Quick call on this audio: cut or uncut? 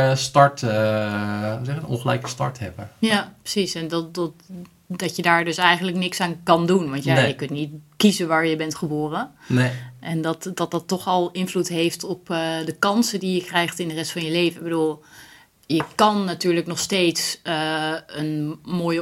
uncut